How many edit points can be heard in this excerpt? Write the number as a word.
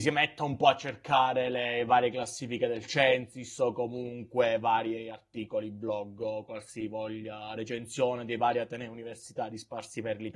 zero